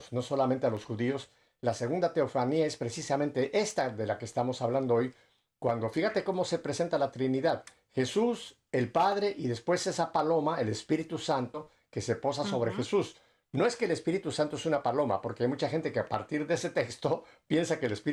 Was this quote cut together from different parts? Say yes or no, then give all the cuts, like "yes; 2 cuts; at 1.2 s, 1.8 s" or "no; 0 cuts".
no; 0 cuts